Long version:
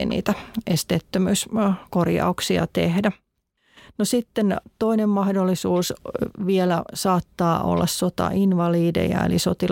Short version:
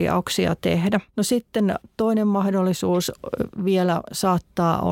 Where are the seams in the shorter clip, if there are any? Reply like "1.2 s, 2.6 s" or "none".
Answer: 1.1 s